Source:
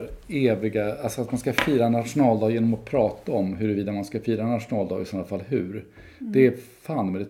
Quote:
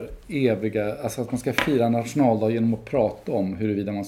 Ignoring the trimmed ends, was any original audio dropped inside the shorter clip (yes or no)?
no